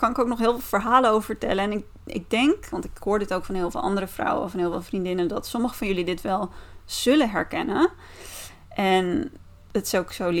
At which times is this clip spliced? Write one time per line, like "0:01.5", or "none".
none